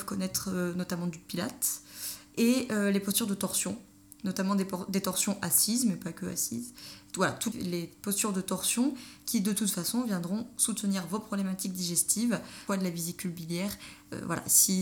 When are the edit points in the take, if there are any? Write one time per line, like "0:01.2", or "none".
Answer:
0:07.5
0:12.7